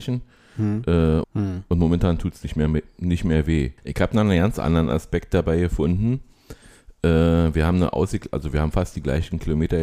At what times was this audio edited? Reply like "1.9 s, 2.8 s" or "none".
1.2 s, 3.8 s